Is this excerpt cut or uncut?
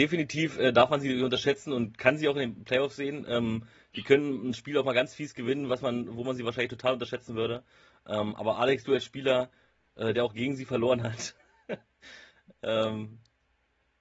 uncut